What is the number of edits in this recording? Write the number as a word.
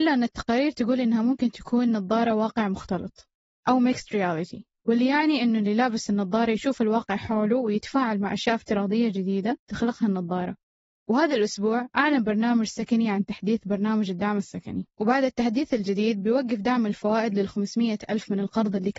one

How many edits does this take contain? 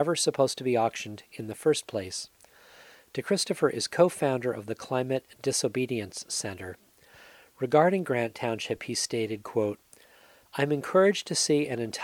zero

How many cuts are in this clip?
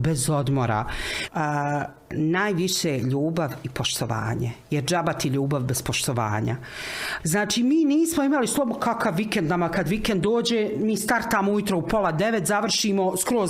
two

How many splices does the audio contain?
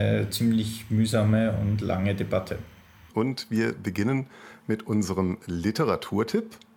one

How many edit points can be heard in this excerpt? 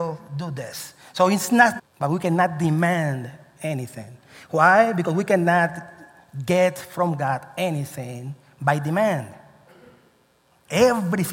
one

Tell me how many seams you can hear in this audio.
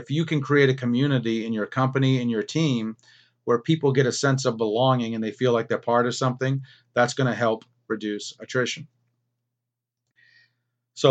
zero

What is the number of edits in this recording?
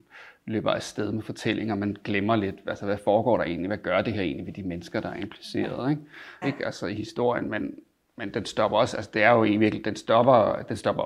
one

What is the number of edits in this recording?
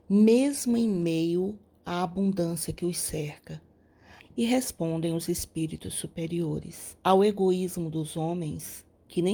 two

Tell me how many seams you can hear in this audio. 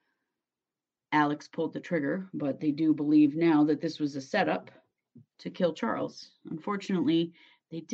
one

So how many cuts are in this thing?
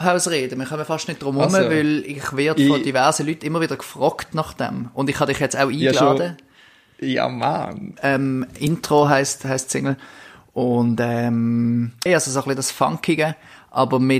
two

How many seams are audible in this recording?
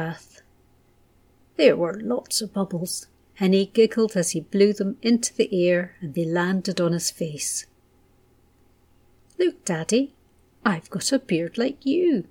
one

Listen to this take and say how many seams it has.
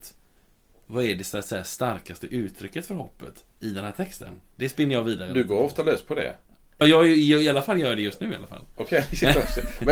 one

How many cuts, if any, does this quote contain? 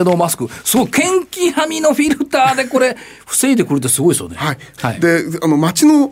one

